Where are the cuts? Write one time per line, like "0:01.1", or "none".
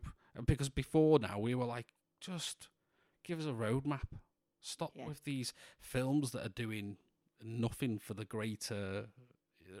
none